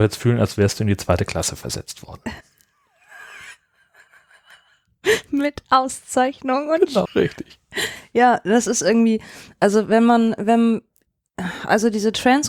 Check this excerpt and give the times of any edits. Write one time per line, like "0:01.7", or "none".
0:07.1